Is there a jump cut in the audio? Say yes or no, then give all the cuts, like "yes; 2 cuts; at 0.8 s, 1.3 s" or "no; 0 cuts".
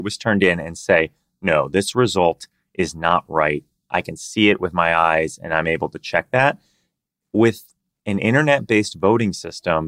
no; 0 cuts